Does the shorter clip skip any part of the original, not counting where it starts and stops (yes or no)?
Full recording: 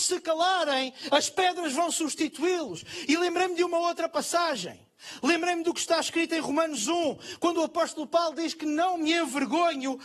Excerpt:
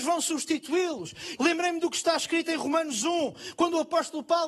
yes